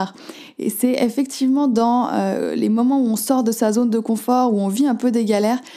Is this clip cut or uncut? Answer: uncut